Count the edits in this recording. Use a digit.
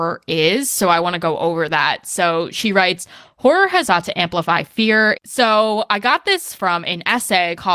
2